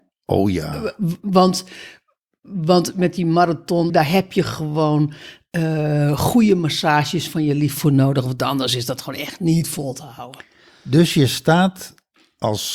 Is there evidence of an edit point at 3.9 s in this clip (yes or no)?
yes